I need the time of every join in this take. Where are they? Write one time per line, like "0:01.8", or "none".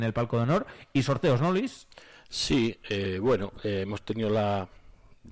none